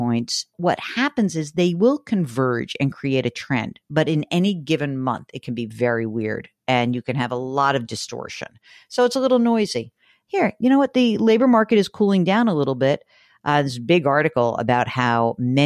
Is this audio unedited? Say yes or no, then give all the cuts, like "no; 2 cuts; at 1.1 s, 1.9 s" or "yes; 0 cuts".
yes; 0 cuts